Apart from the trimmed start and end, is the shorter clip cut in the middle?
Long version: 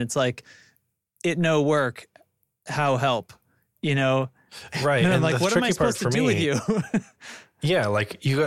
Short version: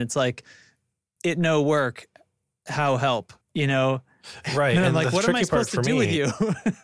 yes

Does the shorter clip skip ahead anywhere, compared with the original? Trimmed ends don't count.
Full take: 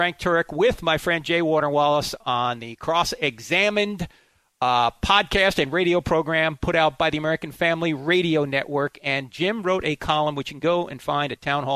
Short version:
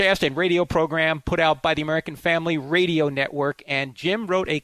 no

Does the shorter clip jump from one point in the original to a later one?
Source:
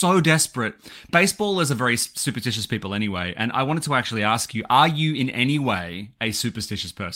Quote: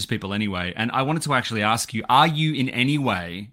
no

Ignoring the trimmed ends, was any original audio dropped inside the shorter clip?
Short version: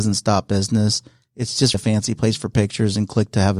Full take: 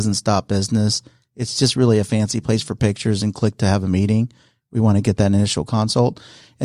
yes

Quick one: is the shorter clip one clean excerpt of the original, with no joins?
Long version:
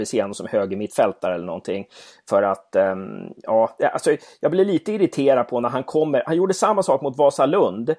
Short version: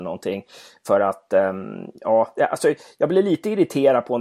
yes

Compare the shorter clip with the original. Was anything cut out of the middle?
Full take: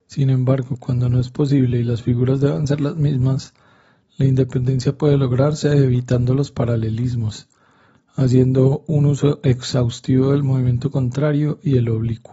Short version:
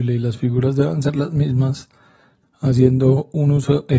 yes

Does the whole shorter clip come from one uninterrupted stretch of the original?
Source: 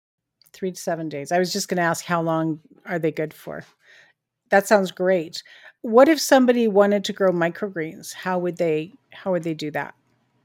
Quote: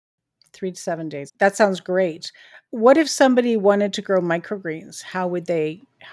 no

